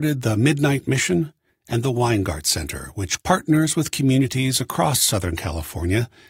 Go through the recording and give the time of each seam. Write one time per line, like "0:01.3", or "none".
0:01.5